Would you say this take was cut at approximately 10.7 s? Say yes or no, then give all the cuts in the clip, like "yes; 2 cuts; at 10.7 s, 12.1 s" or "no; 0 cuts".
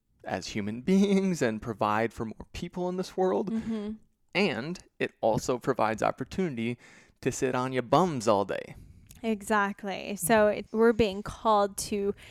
yes; 1 cut; at 10.7 s